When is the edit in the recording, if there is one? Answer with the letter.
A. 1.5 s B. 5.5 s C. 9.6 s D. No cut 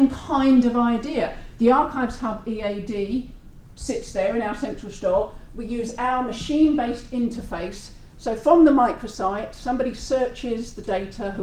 D